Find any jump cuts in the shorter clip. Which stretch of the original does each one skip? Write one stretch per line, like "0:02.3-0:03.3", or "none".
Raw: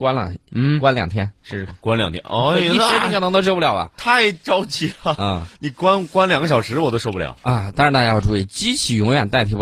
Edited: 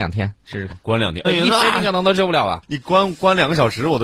0:02.2-0:02.5
0:03.9-0:05.5